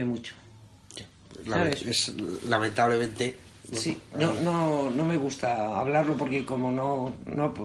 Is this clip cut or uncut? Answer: uncut